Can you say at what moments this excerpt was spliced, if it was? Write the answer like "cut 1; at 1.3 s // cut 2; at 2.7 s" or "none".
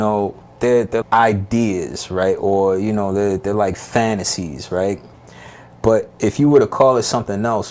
cut 1; at 1.0 s